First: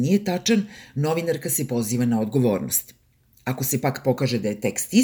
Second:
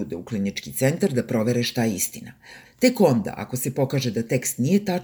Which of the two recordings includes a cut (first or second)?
second